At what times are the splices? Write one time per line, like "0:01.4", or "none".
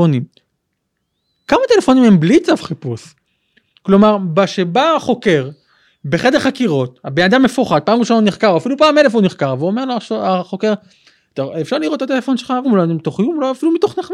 0:12.6